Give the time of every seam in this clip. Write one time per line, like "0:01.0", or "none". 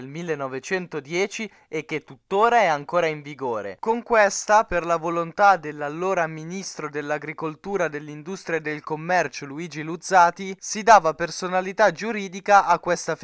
none